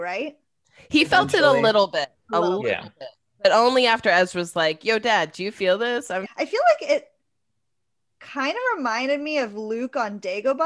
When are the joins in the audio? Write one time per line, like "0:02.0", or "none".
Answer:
0:06.3